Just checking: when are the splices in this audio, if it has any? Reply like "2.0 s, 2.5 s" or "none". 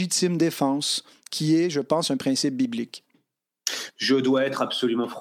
3.9 s